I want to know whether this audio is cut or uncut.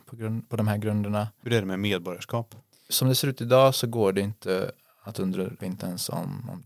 cut